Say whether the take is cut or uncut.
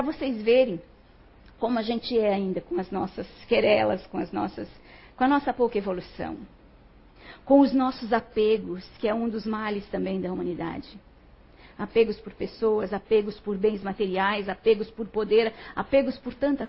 uncut